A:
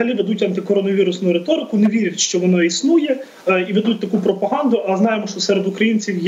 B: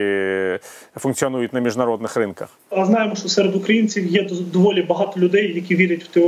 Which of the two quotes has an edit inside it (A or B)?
B